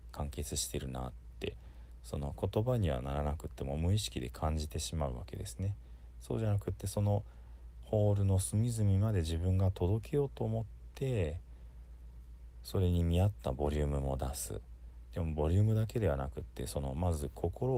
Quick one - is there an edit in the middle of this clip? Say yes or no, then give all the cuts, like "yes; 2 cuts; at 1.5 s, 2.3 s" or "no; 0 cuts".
no; 0 cuts